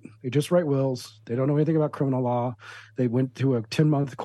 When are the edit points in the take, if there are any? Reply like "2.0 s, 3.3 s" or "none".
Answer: none